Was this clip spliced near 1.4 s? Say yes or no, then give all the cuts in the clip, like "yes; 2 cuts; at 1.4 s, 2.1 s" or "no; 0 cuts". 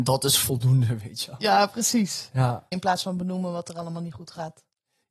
no; 1 cut; at 2.7 s